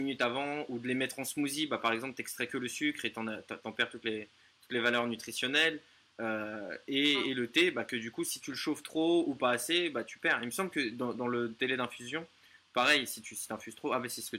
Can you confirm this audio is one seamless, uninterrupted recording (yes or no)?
yes